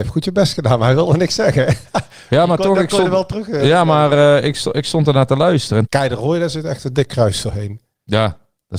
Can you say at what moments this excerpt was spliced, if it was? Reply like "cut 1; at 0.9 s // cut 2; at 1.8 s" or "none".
cut 1; at 5.8 s